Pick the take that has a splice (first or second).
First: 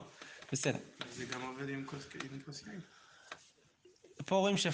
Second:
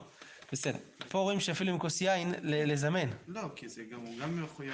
second